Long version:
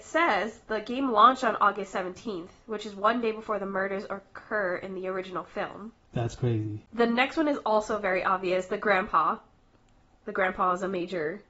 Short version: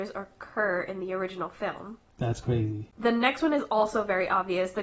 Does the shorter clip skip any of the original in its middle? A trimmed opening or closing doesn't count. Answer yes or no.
no